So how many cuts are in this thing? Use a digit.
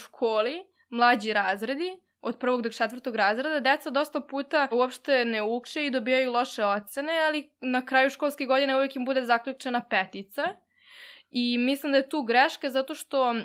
1